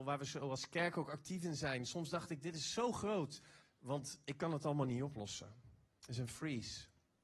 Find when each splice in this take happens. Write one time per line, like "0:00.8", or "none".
0:03.6